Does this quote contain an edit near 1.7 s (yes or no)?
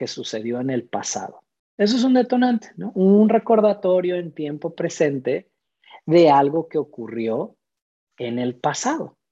no